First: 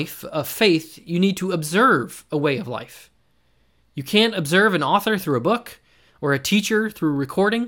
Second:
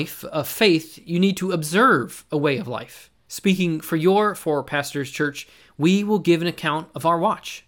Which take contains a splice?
second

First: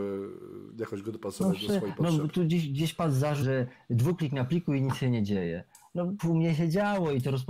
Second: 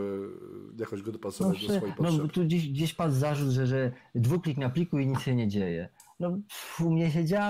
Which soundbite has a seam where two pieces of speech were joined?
first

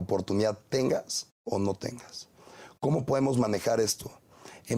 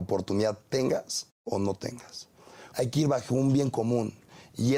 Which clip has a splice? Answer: second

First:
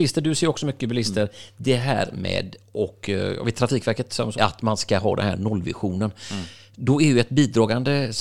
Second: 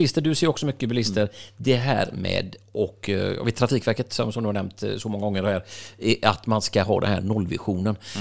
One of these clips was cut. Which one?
first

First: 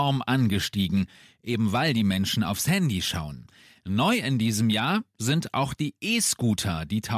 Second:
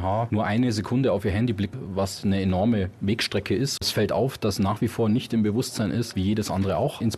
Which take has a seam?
second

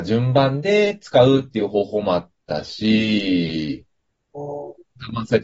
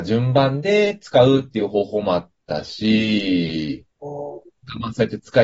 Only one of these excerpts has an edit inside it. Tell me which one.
second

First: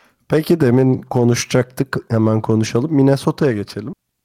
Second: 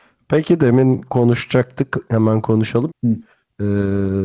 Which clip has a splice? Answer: second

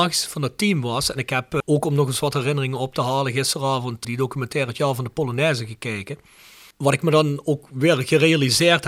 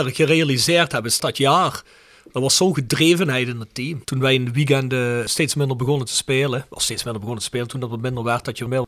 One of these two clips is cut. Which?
second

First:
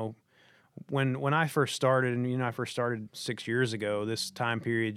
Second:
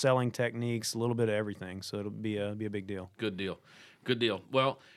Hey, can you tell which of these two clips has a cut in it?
first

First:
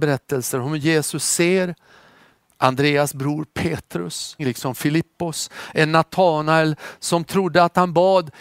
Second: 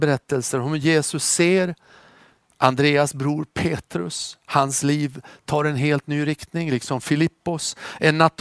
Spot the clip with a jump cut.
first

